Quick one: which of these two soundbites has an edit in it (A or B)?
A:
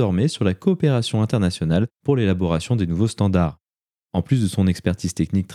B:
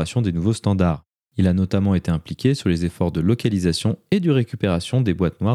B